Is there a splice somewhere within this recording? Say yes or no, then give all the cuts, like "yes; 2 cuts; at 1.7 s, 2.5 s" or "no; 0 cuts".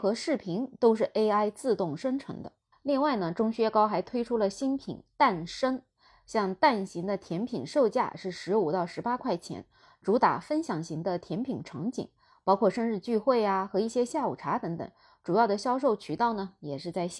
no; 0 cuts